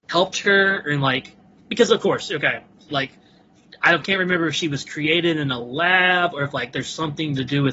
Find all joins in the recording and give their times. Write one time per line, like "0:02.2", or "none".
0:02.9